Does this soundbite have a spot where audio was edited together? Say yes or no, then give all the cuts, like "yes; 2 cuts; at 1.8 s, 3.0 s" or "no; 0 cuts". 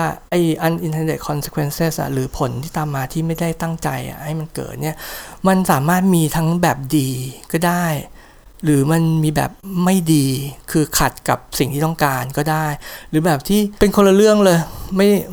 yes; 1 cut; at 13.8 s